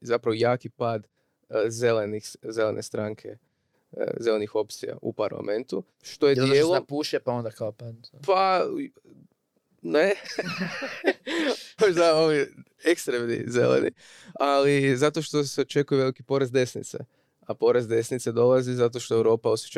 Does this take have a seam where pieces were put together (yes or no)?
yes